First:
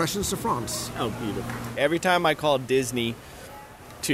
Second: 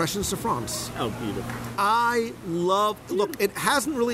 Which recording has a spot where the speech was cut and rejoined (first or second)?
first